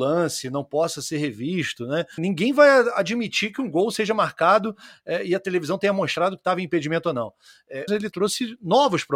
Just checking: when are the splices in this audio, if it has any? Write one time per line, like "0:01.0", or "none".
0:02.2
0:07.9